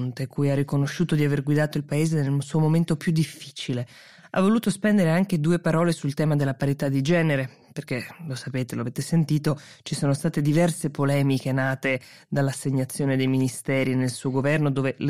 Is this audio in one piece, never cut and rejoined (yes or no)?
yes